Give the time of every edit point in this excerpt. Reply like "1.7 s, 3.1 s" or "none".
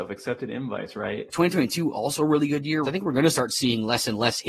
1.3 s, 2.8 s

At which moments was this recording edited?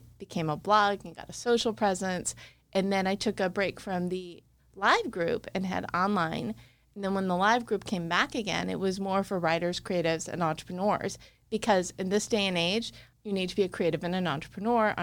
13.1 s

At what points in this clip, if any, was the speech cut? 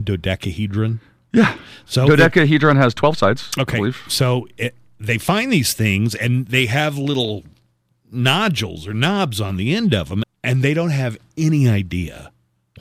10.2 s

